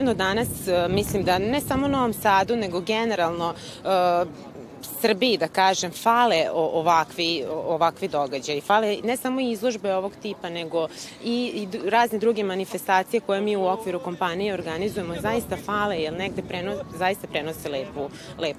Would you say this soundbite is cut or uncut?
uncut